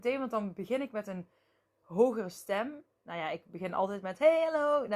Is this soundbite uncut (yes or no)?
yes